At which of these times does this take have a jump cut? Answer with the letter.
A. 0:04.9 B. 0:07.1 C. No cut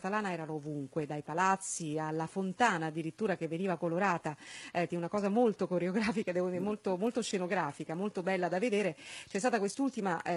A